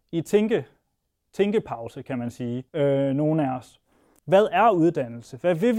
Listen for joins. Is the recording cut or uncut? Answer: cut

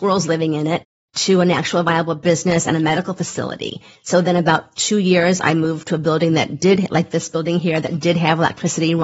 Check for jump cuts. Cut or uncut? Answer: uncut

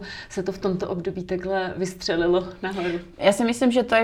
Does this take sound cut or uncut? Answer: cut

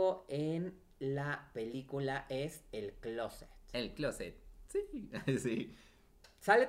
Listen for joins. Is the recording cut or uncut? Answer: uncut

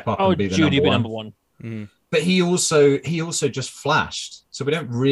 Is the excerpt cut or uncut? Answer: uncut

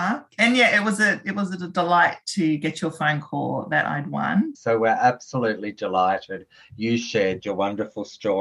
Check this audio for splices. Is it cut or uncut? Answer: cut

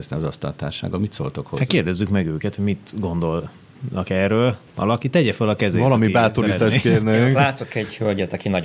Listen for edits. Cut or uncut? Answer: cut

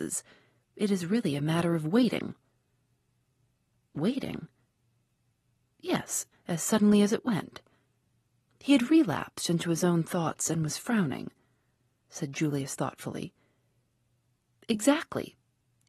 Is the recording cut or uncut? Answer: cut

